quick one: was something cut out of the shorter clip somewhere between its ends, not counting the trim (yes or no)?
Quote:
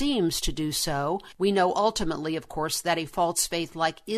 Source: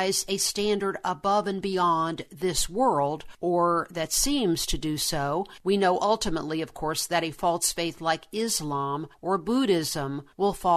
no